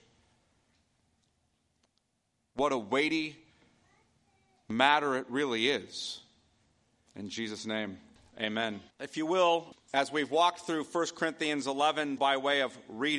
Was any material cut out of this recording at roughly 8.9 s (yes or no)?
yes